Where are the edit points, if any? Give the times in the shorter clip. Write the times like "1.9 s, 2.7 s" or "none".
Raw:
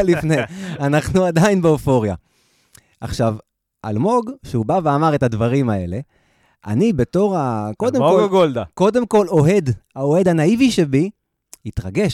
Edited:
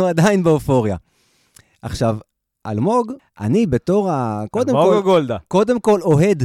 3.2 s